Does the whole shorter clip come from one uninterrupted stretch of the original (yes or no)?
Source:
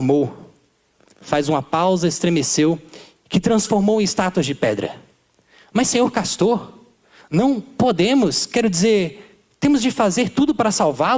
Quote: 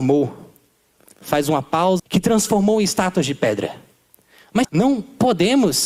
no